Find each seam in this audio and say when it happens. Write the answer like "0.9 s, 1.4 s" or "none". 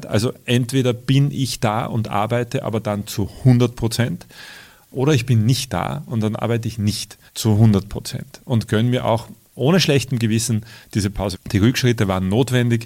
7.3 s, 11.3 s

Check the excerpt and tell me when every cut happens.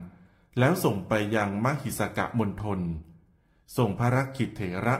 none

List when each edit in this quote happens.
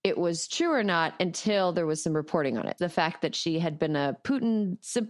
2.8 s

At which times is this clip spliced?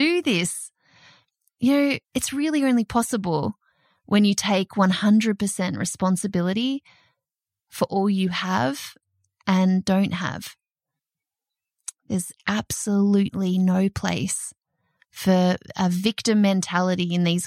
2.0 s

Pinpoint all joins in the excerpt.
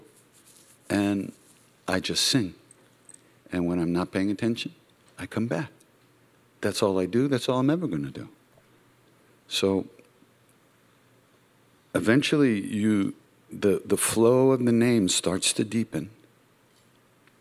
13.5 s

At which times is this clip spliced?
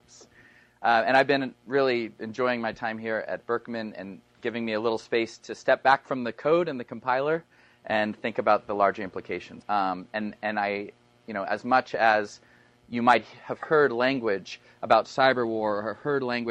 9.6 s

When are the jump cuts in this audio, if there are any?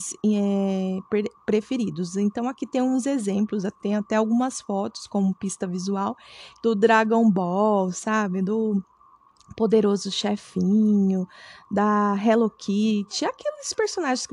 6.6 s

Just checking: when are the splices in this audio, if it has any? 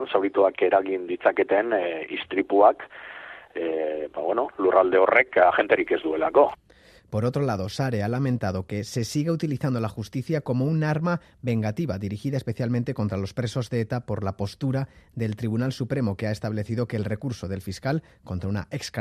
none

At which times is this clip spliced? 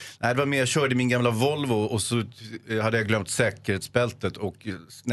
none

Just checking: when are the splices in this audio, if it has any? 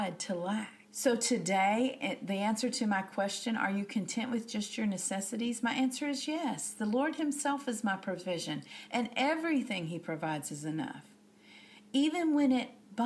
none

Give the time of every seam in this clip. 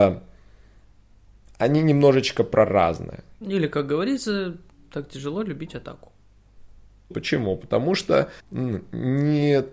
3.4 s, 7.1 s, 8.4 s

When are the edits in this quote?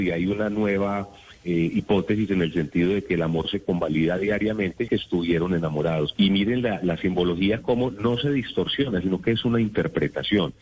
4.9 s, 6.2 s

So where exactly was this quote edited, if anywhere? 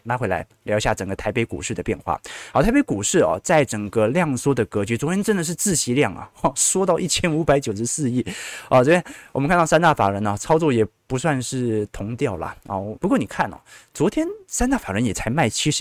13.0 s

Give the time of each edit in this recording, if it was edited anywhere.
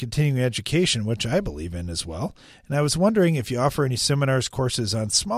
none

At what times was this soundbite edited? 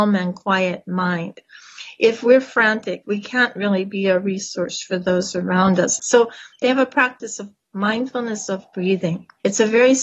3.0 s

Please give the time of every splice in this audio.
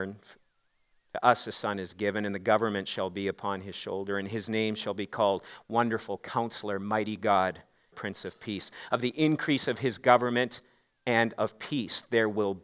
7.9 s

